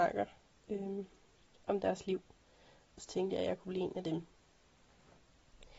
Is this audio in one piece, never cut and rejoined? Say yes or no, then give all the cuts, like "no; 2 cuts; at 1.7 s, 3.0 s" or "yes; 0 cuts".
yes; 0 cuts